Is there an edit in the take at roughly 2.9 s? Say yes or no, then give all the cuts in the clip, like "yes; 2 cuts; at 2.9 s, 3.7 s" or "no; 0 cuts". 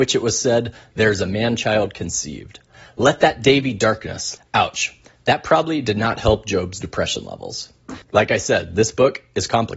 no; 2 cuts; at 4.4 s, 8.0 s